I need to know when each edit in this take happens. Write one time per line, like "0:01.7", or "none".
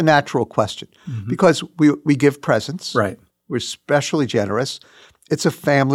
none